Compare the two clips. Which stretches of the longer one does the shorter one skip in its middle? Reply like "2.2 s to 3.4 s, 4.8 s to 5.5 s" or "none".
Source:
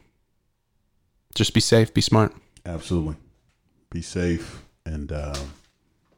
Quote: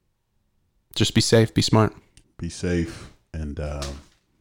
2.6 s to 3.8 s